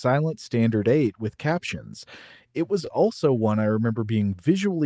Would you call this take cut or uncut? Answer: uncut